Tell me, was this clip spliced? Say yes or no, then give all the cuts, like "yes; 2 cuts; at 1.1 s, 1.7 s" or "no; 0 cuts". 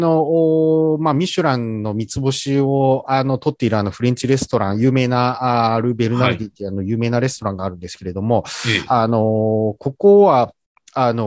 no; 0 cuts